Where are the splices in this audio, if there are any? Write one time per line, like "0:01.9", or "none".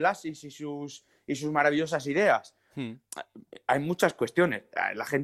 0:02.7